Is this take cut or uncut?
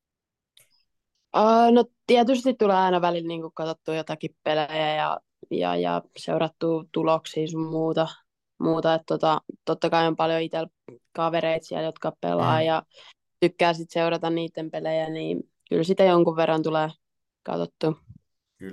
uncut